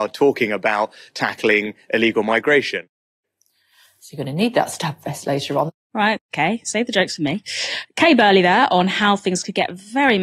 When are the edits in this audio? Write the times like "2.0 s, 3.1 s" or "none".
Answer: 5.8 s